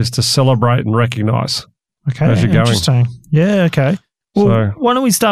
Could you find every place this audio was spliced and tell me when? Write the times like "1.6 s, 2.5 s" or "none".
none